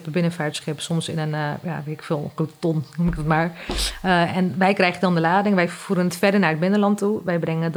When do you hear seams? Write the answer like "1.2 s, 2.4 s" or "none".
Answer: none